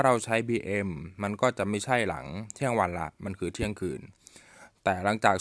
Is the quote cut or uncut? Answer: uncut